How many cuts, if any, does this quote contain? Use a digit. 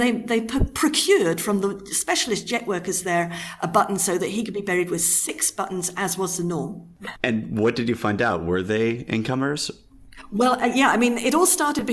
1